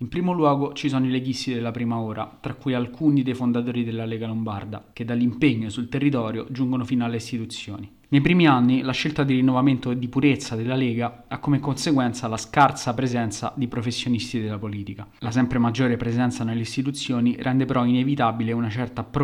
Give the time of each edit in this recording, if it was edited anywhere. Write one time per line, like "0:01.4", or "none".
none

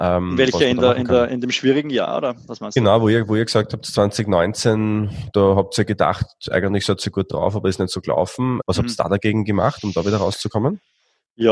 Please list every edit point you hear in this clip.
0:08.6

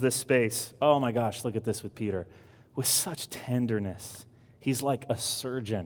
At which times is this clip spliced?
none

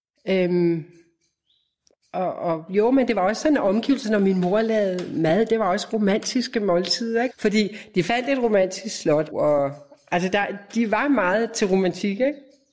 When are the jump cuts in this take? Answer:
0:07.3
0:09.3

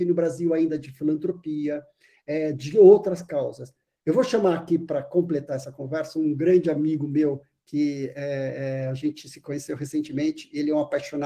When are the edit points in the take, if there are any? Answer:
none

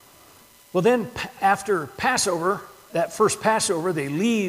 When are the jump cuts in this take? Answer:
0:02.9

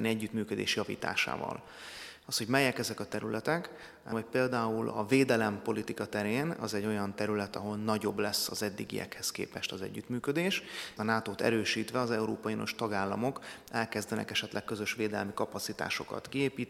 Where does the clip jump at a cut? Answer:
0:02.2
0:04.1
0:11.0

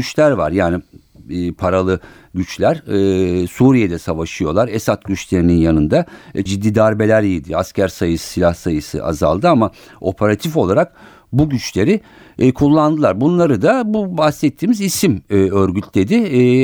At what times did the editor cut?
0:06.5

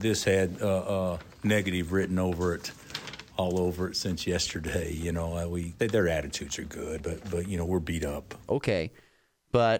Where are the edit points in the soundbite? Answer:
0:05.8
0:07.0
0:08.5

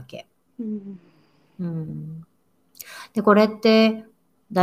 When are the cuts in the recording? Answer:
none

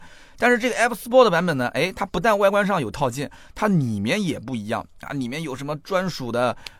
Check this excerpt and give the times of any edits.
none

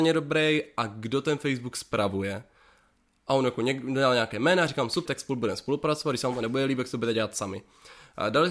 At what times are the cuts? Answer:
0:05.1

